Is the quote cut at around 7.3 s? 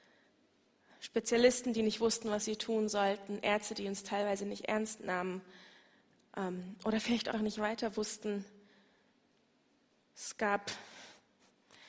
yes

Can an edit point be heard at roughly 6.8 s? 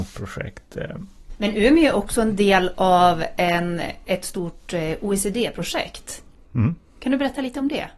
no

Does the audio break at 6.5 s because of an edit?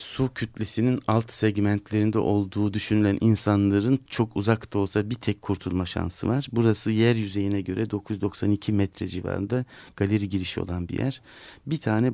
no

